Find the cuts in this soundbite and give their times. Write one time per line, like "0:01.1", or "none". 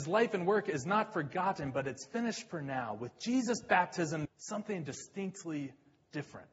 0:04.3